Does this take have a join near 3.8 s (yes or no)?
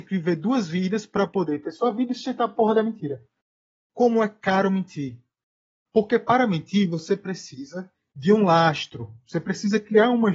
yes